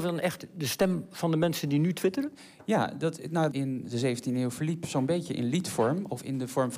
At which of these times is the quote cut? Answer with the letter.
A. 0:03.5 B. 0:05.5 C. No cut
A